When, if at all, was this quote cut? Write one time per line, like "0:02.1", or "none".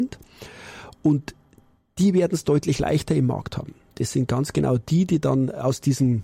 none